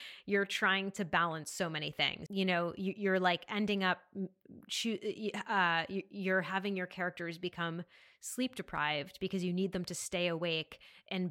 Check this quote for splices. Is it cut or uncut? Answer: cut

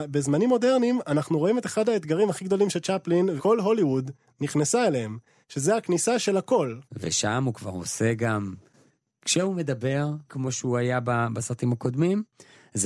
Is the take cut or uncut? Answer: cut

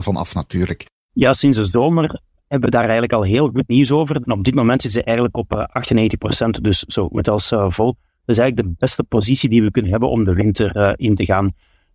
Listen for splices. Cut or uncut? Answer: cut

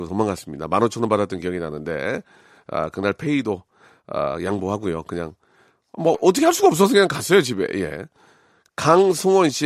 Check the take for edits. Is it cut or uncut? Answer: cut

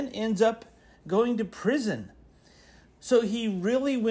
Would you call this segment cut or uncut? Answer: uncut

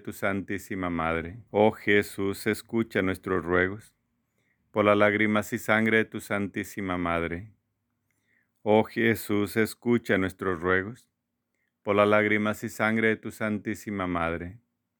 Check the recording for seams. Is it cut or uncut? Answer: cut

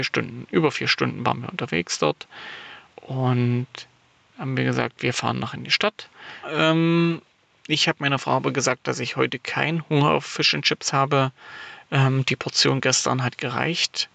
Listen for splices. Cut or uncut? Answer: cut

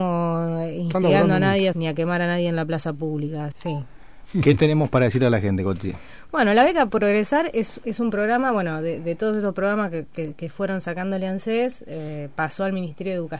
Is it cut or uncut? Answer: cut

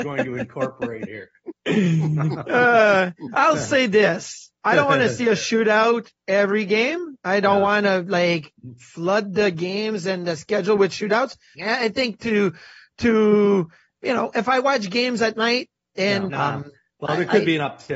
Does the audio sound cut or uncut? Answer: cut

